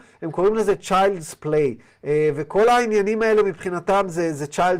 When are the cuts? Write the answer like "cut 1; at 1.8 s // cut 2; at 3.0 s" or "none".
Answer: cut 1; at 1.9 s